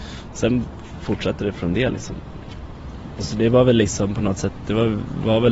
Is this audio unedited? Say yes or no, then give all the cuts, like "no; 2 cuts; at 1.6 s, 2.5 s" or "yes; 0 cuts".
yes; 0 cuts